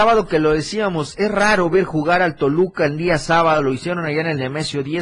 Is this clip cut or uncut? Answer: uncut